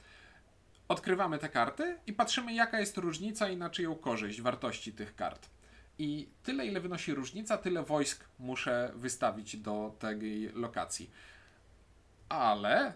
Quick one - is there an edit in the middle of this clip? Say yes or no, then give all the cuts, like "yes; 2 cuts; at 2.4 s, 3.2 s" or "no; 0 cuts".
no; 0 cuts